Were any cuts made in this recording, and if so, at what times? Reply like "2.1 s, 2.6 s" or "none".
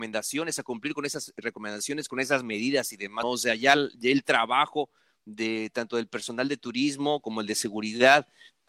3.2 s

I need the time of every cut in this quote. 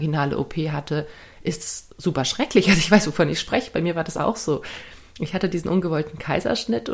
none

